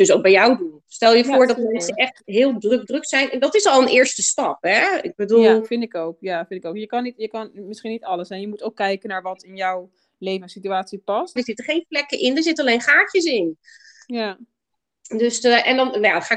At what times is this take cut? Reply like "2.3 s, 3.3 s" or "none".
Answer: 2.9 s, 11.4 s